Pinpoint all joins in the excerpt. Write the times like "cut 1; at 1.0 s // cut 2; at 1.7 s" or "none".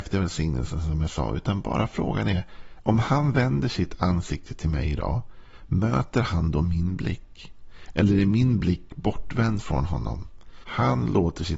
cut 1; at 2.8 s // cut 2; at 10.6 s